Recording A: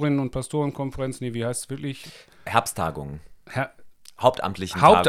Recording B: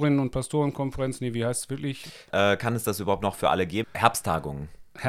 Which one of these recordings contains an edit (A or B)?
B